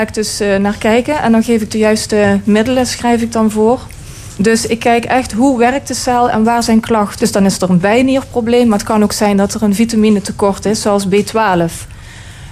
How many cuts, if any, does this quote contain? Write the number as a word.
two